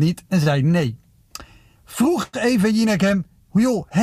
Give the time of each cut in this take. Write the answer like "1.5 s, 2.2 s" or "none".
1.8 s